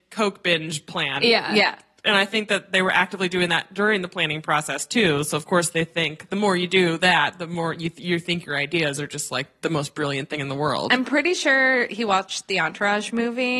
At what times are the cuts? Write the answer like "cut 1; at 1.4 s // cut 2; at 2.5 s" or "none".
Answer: cut 1; at 6.3 s